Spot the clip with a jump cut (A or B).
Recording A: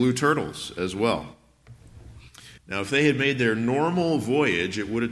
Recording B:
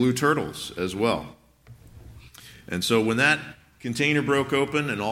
A